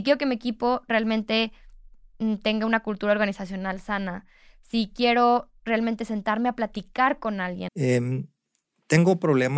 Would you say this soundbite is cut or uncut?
cut